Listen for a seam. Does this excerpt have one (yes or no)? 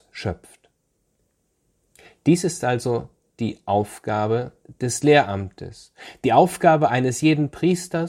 no